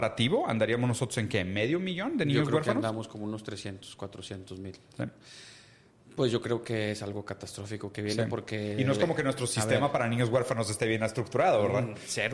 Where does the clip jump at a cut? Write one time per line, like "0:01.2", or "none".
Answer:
none